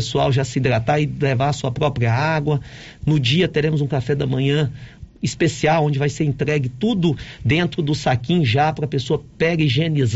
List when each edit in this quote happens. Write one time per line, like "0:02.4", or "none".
none